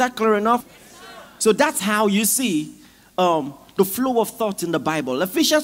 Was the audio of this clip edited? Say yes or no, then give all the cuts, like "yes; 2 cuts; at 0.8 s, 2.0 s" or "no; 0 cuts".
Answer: yes; 1 cut; at 1.4 s